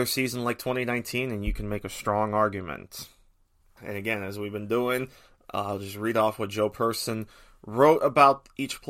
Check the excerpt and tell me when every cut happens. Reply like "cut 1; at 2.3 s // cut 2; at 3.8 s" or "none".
cut 1; at 3.8 s